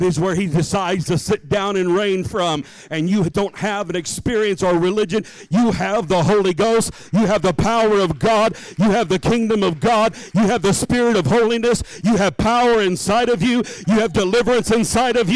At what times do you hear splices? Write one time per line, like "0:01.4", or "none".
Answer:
0:03.3
0:10.3
0:13.8